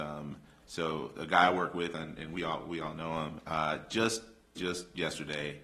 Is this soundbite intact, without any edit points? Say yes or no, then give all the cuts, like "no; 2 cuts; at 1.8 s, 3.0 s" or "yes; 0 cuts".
no; 1 cut; at 4.6 s